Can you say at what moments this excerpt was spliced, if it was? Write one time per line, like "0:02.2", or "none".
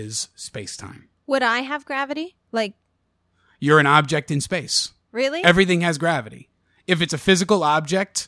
0:02.4